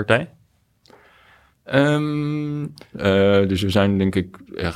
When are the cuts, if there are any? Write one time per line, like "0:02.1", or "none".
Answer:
0:02.9